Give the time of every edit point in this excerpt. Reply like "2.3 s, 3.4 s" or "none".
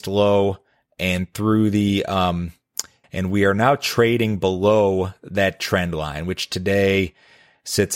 3.0 s